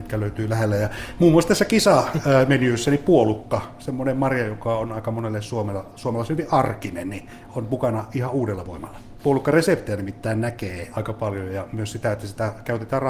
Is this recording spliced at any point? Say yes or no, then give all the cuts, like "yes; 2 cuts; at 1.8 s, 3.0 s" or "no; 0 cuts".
yes; 1 cut; at 9.2 s